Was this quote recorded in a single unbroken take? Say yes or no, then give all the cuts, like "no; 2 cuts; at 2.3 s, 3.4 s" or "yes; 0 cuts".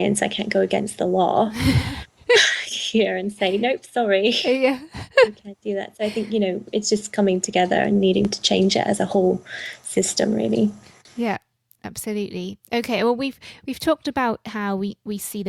yes; 0 cuts